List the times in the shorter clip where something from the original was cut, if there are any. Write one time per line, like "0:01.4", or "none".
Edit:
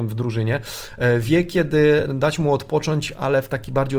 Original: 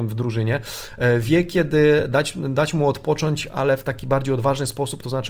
0:02.1